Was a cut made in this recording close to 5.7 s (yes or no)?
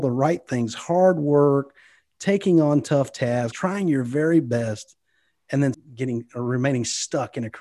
yes